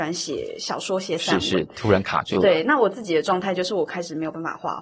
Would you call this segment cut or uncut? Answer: uncut